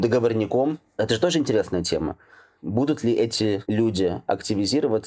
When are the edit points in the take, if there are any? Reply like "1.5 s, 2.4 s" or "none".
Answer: none